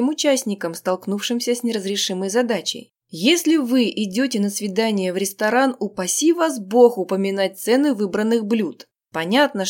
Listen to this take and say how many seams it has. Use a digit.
1